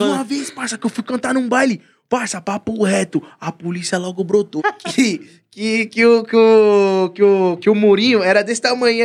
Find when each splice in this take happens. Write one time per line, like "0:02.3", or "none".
0:04.6